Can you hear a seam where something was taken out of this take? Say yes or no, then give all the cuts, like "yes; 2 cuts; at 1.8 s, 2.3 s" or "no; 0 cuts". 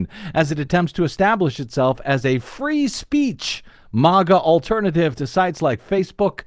no; 0 cuts